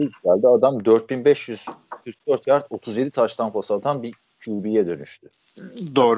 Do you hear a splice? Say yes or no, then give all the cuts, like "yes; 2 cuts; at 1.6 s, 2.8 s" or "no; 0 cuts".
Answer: no; 0 cuts